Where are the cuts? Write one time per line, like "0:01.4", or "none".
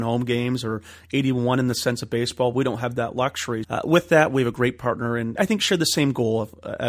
0:03.6
0:05.4